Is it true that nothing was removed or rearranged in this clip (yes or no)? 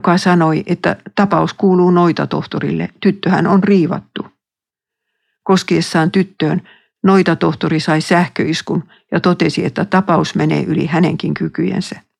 yes